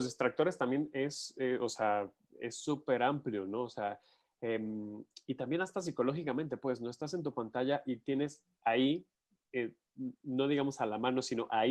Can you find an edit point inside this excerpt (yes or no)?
no